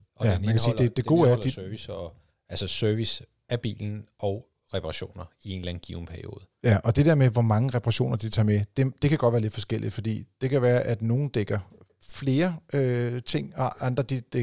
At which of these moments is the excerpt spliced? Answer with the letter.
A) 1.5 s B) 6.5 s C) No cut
C